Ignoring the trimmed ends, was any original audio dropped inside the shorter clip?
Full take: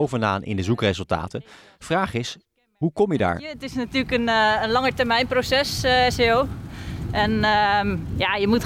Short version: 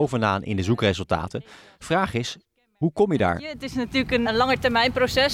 yes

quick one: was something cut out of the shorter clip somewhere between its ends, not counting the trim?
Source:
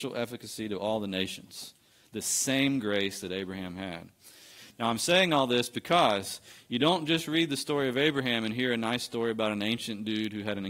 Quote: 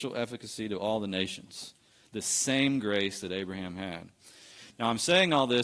no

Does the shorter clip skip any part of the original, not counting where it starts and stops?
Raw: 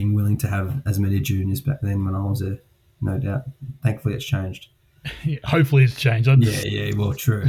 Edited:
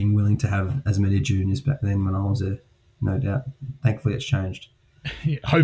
no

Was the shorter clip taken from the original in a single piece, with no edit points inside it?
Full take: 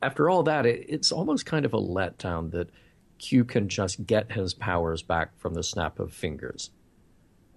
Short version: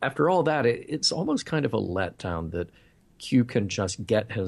yes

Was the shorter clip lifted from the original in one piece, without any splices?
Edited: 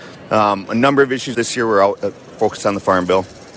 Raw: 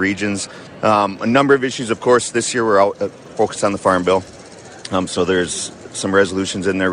no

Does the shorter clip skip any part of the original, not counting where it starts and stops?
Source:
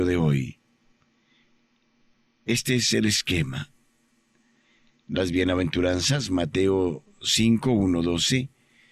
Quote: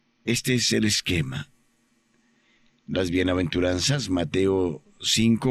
no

